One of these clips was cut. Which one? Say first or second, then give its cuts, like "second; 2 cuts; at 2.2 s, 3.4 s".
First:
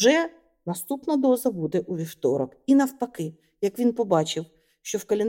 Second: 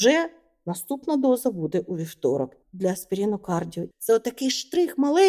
second; 2 cuts; at 2.6 s, 3.9 s